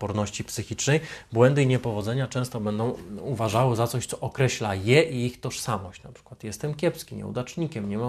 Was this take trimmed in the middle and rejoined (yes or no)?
no